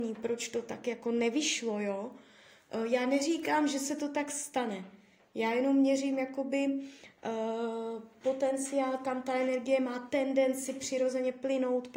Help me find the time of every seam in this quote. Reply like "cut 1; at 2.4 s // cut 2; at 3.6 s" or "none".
none